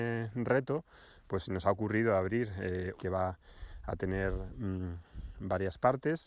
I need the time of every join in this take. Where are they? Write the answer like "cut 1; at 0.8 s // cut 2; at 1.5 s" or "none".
cut 1; at 3.0 s